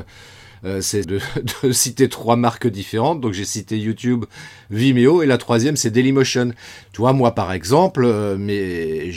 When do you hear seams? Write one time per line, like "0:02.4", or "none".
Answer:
0:01.0
0:06.8